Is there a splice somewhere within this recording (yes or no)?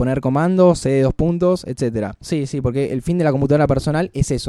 yes